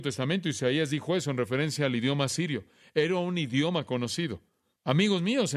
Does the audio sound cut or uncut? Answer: uncut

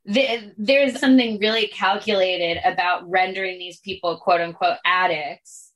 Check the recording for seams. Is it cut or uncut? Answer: cut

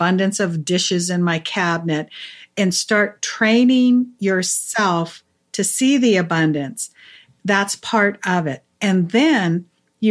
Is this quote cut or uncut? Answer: uncut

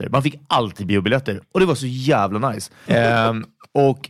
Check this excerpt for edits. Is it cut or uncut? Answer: cut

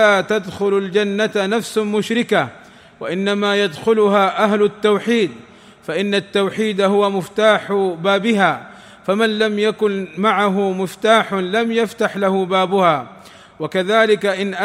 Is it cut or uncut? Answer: uncut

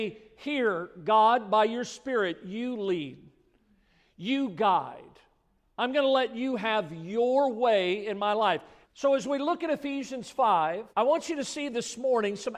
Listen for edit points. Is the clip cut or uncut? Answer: cut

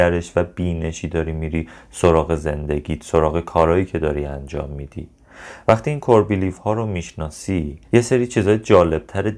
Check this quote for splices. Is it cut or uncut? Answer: cut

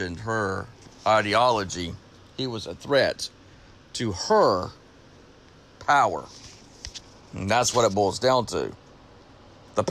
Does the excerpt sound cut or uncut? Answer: uncut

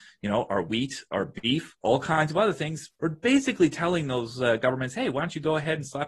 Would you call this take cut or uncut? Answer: cut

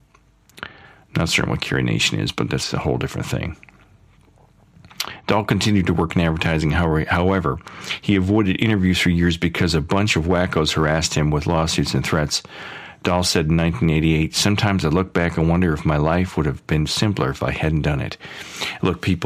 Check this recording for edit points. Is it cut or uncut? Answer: uncut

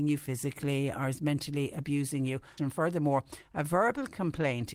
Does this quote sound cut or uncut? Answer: cut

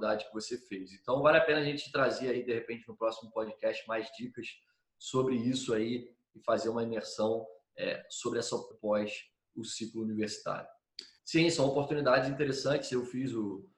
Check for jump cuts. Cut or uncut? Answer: cut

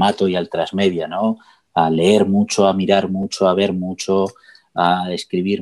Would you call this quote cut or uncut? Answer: uncut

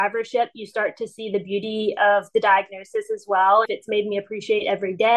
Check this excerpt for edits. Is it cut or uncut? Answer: cut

